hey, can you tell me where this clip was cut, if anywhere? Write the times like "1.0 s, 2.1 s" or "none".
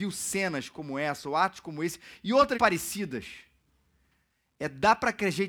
2.5 s

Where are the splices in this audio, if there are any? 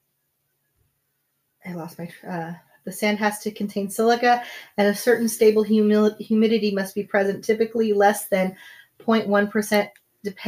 none

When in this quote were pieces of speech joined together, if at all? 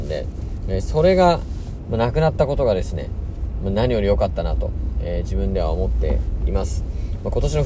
none

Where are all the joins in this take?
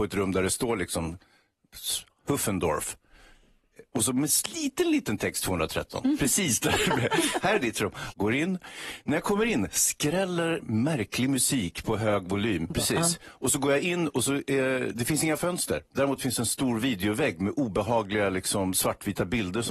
8.1 s, 12.7 s

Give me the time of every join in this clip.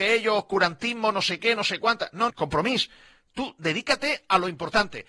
2.3 s

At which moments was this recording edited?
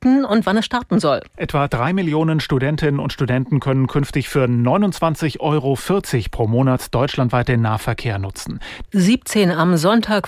1.3 s, 8.9 s

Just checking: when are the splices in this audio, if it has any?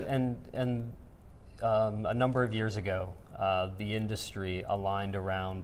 none

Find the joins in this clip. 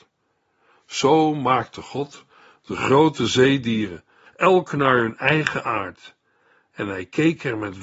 4.3 s

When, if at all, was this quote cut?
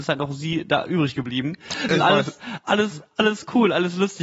1.9 s

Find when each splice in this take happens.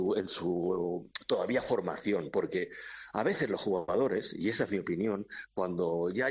none

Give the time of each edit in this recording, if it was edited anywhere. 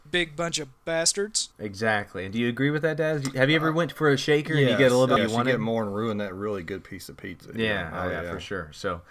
5.2 s

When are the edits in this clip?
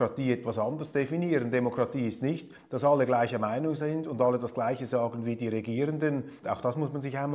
6.4 s

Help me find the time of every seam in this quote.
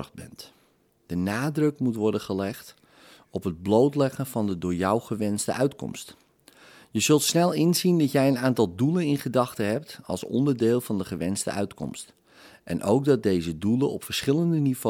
none

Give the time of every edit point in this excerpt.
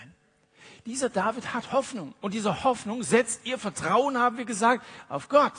none

